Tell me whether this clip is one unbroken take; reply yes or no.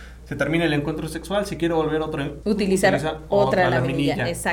no